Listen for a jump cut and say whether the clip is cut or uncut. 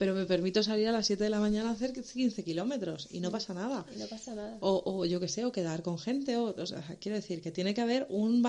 uncut